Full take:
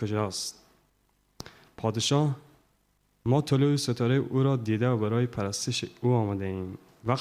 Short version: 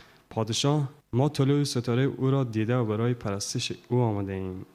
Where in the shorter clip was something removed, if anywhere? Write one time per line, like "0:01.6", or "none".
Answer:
0:01.0